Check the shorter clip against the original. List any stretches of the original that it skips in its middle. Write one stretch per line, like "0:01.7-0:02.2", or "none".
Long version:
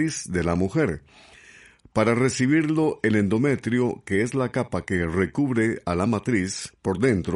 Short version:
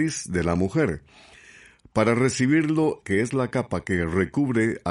0:03.0-0:04.0